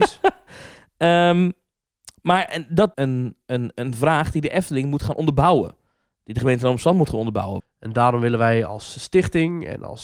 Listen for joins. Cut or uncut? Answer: cut